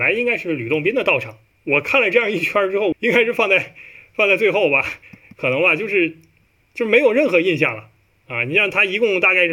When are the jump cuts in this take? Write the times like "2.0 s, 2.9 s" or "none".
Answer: 1.5 s, 2.9 s